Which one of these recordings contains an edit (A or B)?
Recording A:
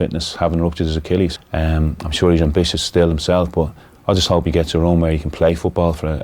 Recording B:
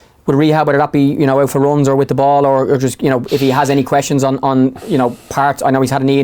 A